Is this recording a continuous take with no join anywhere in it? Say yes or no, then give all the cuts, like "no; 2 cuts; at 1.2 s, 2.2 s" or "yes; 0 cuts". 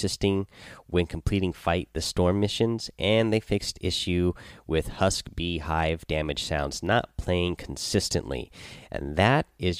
yes; 0 cuts